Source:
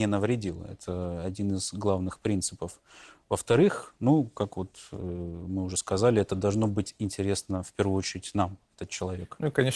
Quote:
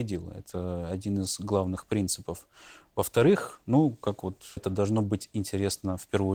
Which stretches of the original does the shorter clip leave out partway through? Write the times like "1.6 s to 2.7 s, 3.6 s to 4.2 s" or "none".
4.9 s to 6.2 s

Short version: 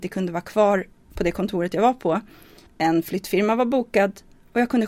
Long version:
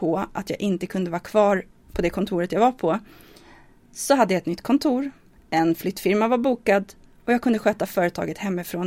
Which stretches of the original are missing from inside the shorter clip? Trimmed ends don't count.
3.4 s to 5.4 s

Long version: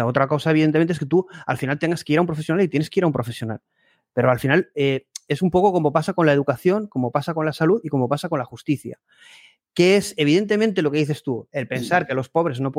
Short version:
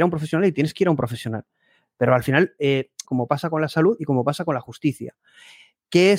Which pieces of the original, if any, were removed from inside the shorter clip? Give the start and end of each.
5.2 s to 6.9 s

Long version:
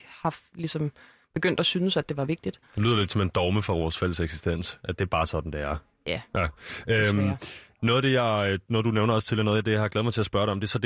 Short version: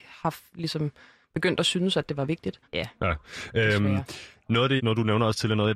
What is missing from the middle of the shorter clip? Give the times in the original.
2.6 s to 6.0 s, 8.1 s to 8.6 s

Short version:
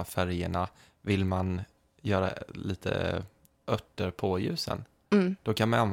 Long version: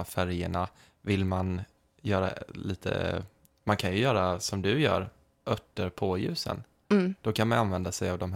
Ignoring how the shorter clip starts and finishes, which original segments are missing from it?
3.5 s to 5.3 s

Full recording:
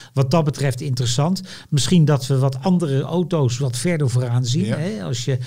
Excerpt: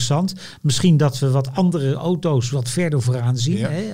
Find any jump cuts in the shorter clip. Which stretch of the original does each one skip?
none

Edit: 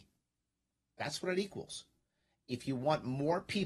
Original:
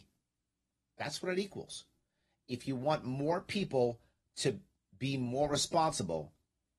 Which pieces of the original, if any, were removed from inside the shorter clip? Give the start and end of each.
none

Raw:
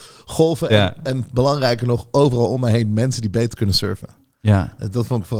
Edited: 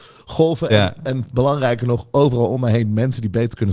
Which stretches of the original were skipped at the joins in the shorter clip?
none

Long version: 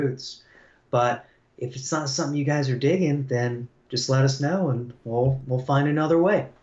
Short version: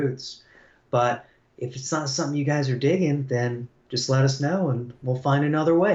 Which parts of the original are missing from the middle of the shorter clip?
5.0 s to 5.5 s

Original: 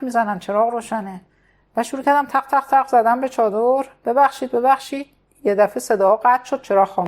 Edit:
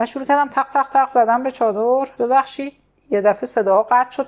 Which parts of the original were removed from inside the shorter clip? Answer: 3.9 s to 4.5 s

